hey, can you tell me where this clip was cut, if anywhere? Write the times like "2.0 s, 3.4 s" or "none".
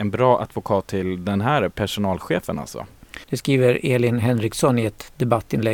3.2 s